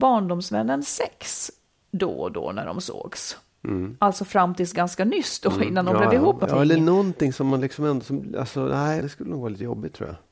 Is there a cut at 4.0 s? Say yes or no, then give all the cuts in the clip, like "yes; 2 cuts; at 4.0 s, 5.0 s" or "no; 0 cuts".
no; 2 cuts; at 6.5 s, 9.0 s